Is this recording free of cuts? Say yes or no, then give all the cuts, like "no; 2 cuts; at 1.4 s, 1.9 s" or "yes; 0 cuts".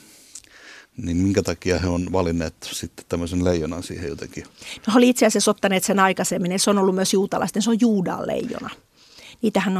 yes; 0 cuts